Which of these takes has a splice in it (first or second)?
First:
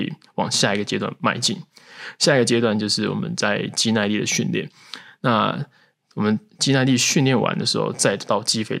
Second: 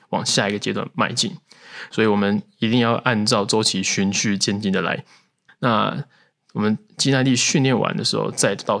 second